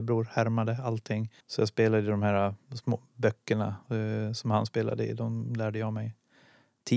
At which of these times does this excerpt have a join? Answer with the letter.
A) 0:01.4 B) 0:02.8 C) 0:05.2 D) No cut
A